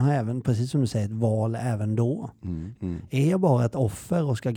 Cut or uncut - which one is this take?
cut